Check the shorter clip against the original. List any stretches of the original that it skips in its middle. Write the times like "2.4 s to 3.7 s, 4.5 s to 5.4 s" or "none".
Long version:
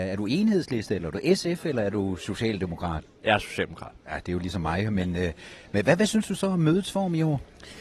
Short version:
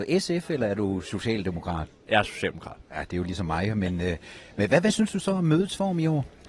none